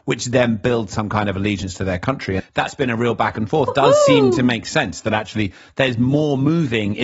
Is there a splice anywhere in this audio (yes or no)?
yes